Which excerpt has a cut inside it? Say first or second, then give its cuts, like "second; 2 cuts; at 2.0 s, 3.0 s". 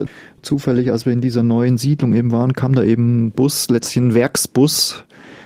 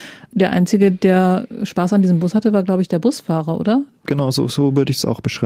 second; 1 cut; at 4.0 s